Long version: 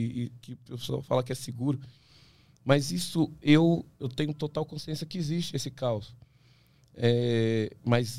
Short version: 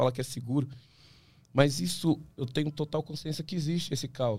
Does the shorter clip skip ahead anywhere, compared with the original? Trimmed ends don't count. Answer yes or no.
yes